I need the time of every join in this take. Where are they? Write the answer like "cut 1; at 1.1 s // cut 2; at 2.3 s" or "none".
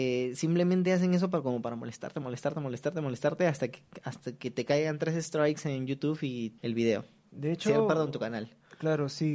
cut 1; at 6.6 s